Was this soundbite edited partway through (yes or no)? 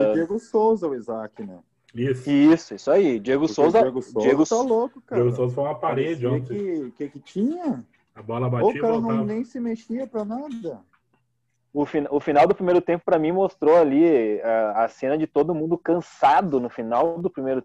no